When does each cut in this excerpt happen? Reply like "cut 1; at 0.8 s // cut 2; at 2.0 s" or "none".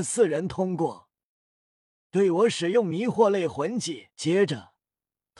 cut 1; at 2.1 s // cut 2; at 4.1 s